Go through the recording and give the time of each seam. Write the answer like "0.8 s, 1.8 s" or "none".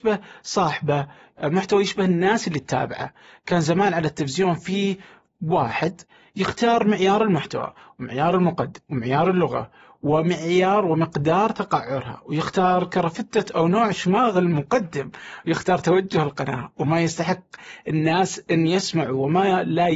none